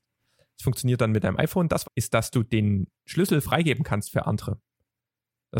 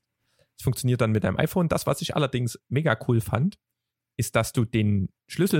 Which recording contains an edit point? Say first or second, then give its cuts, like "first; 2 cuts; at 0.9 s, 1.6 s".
first; 1 cut; at 1.8 s